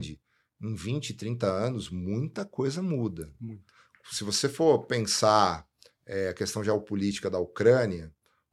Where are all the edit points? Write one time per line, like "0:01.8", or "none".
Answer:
none

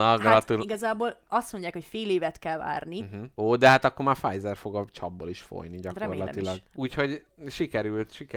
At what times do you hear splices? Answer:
0:03.3
0:06.7

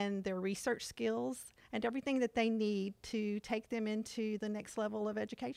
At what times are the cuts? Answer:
none

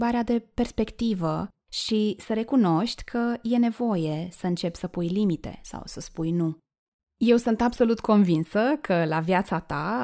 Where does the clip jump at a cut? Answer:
none

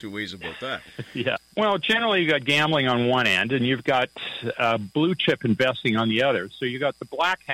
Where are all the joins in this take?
0:01.4

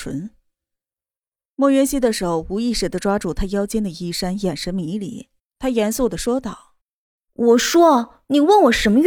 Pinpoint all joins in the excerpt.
0:05.4
0:06.8

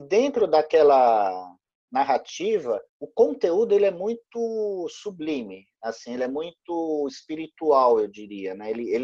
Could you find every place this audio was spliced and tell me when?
0:02.9

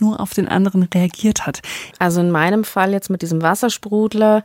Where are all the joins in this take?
0:01.9

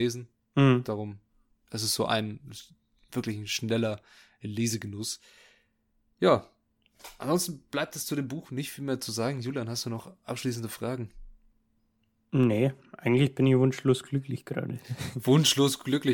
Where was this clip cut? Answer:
none

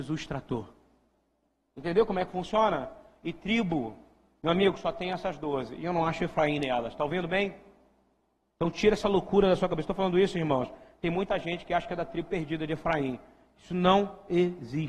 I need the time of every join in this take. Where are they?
none

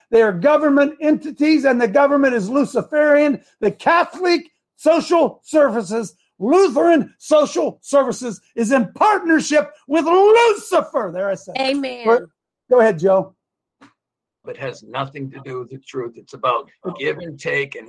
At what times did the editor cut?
0:14.4

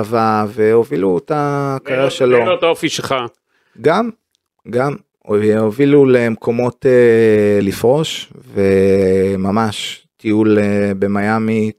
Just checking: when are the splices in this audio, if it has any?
0:07.6

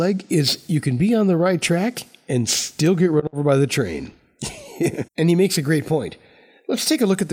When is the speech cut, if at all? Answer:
0:05.1

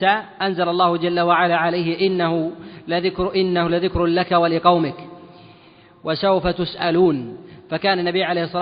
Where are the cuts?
none

